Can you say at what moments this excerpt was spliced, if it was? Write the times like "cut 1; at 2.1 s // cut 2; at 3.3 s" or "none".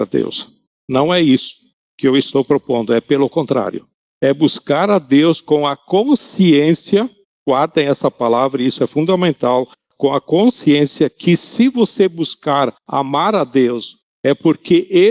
none